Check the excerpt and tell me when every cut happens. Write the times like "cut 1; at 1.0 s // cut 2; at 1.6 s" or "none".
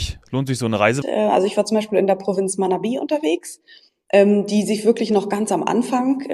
cut 1; at 1.0 s